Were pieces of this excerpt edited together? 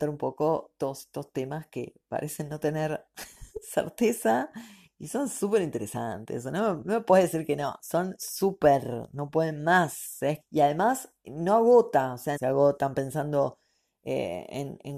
yes; 2 cuts; at 10.4 s, 12.4 s

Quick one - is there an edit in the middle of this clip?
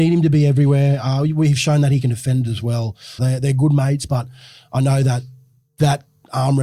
yes; 1 cut; at 3.2 s

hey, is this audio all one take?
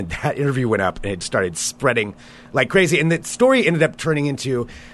no; 1 cut; at 1.2 s

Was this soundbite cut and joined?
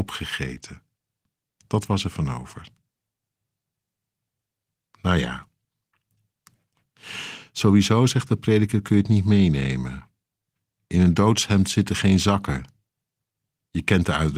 no; 0 cuts

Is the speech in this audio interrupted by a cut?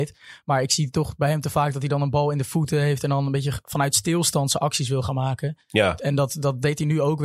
no; 0 cuts

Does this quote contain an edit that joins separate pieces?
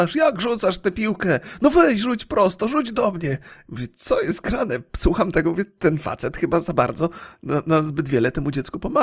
no; 0 cuts

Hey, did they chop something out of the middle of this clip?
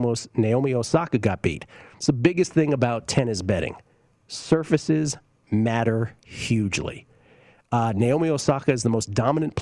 no; 0 cuts

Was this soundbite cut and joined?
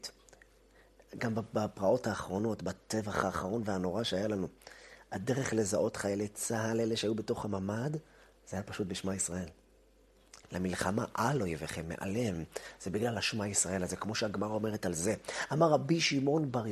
yes; 1 cut; at 10.4 s

